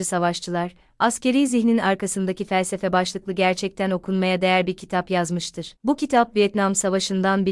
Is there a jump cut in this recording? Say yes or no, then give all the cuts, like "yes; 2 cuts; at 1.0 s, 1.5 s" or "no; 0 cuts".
no; 0 cuts